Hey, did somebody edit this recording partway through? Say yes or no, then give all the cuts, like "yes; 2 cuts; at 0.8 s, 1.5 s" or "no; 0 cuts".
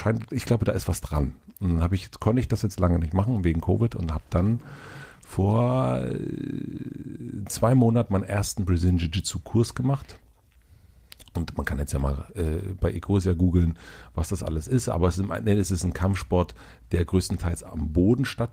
no; 0 cuts